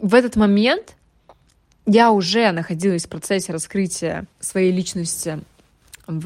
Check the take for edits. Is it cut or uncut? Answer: cut